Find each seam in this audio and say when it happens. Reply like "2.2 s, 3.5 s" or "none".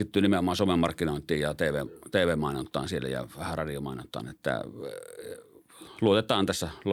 none

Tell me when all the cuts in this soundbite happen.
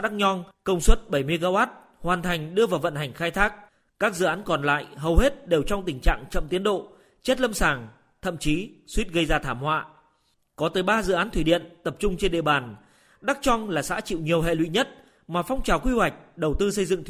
none

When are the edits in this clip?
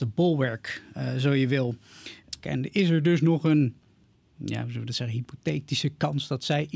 2.4 s

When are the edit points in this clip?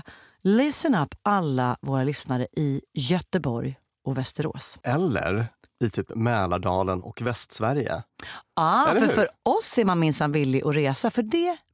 none

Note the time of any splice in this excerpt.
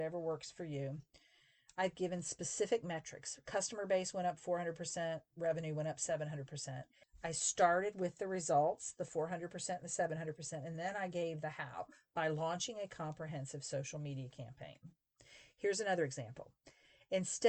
none

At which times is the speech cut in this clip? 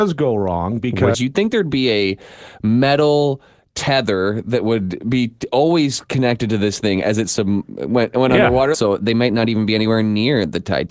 1.1 s, 8.7 s

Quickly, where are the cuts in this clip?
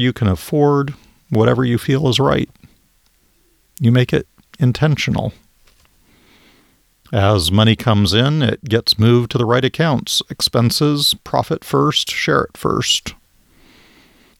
none

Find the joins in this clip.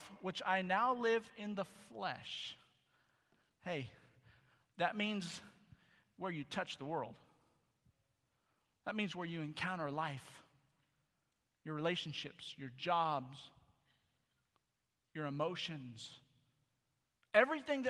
none

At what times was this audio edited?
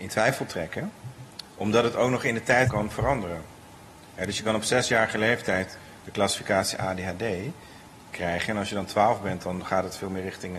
2.7 s

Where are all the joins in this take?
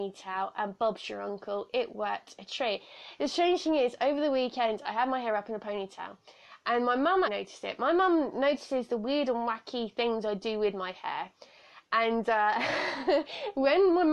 7.3 s

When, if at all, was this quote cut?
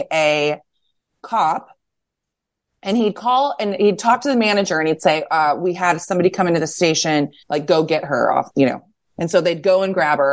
7.4 s, 8.5 s

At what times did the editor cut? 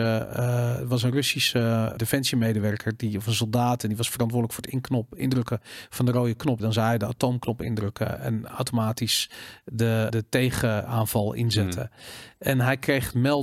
2.0 s, 6.6 s, 10.1 s

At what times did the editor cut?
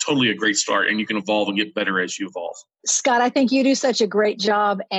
2.8 s

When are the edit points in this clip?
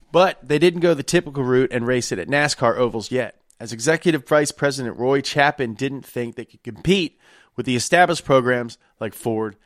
3.1 s

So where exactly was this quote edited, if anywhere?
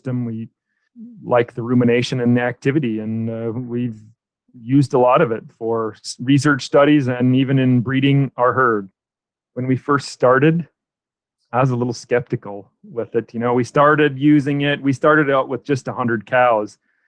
none

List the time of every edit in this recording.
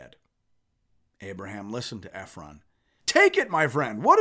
3.0 s

